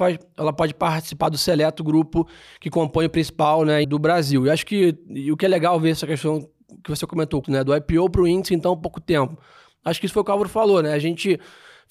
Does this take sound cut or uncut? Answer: cut